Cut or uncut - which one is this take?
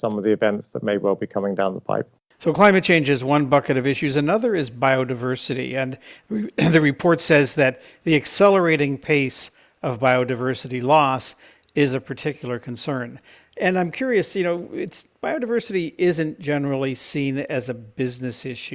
uncut